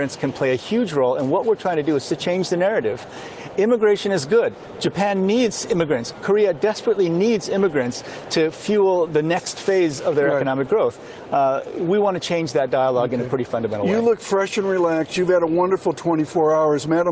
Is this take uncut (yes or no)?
yes